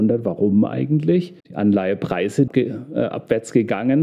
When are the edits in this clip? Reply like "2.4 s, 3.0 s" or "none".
1.4 s, 2.5 s